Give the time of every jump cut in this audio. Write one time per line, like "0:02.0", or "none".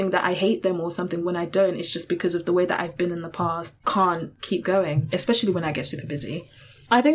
none